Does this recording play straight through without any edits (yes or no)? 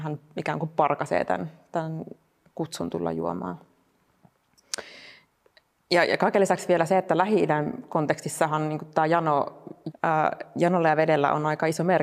no